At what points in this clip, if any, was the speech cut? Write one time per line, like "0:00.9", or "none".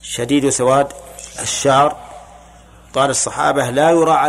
none